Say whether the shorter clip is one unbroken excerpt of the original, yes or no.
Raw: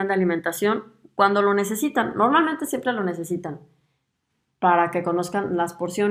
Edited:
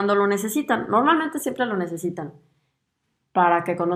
yes